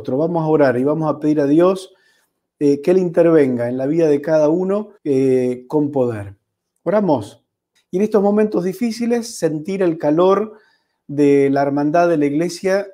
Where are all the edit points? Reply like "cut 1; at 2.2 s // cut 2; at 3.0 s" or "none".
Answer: cut 1; at 5.0 s // cut 2; at 7.8 s